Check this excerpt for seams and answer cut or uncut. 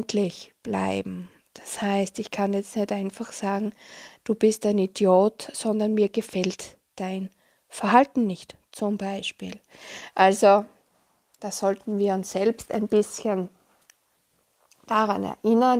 cut